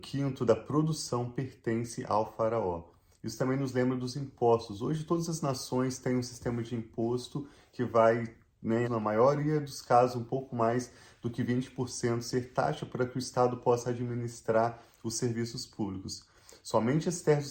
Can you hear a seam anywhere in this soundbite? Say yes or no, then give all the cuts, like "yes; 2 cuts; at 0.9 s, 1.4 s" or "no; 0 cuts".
yes; 1 cut; at 8.8 s